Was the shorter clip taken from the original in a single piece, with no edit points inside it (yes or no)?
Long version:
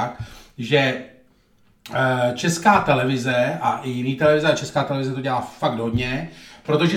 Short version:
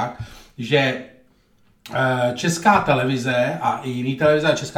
yes